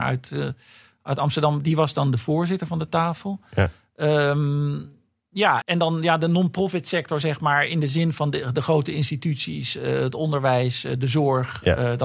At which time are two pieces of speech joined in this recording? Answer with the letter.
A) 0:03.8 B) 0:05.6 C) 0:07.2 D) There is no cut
B